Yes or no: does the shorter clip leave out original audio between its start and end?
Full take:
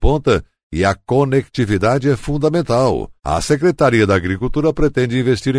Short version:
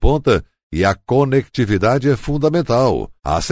no